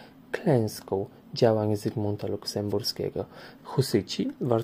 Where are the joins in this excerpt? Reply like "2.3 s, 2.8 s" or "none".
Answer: 3.6 s